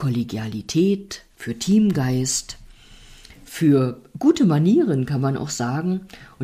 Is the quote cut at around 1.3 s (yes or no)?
yes